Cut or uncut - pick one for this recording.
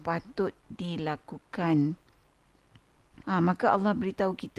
cut